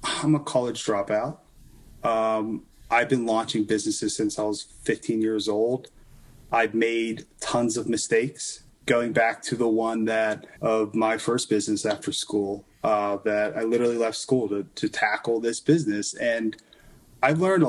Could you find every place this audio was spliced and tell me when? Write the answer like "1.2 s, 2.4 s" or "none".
10.6 s